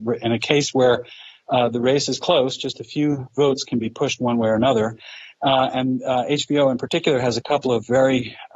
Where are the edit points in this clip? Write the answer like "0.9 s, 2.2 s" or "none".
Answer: none